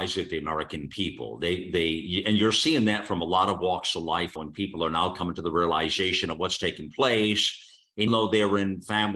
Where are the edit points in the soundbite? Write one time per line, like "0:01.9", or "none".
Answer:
0:04.4
0:08.1